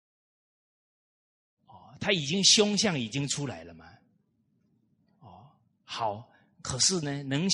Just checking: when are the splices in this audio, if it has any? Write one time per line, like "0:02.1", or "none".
none

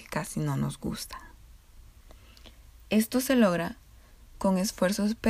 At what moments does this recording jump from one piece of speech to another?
none

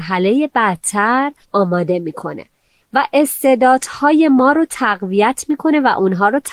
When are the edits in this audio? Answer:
0:01.4

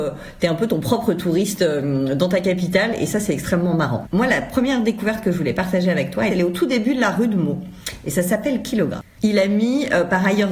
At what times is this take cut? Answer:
0:04.0
0:06.3
0:09.2

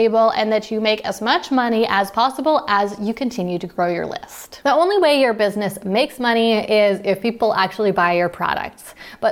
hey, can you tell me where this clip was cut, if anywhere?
0:04.6

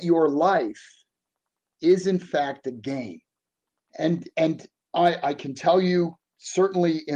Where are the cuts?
0:01.7
0:03.9

